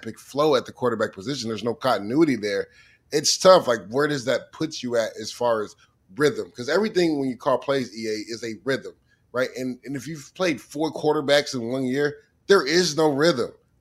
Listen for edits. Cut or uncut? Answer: uncut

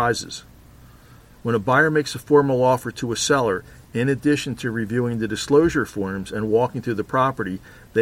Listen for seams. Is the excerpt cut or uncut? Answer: uncut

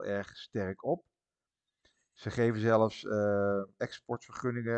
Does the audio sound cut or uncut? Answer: uncut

